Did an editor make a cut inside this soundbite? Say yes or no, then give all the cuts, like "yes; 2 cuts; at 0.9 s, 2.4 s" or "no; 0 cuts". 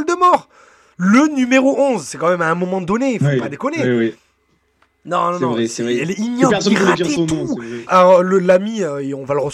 yes; 1 cut; at 7.9 s